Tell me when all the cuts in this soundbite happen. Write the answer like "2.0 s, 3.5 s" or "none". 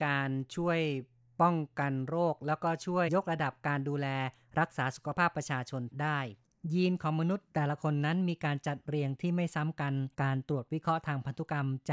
3.1 s, 10.1 s